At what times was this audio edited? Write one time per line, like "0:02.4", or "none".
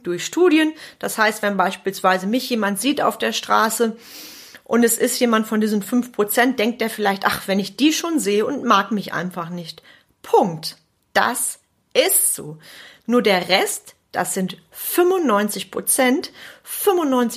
none